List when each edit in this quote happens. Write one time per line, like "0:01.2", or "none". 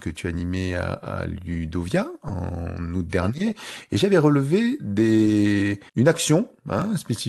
0:05.9